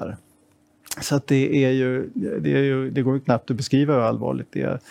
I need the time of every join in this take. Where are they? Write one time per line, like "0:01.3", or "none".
none